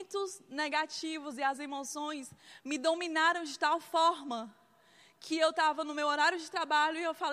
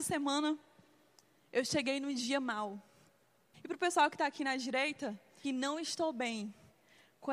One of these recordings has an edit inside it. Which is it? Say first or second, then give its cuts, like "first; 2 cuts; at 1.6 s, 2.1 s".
second; 2 cuts; at 3.5 s, 5.4 s